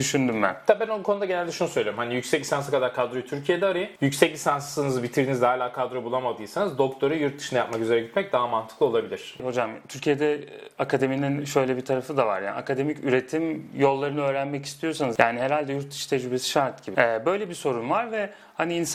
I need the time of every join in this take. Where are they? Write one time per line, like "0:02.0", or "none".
0:16.9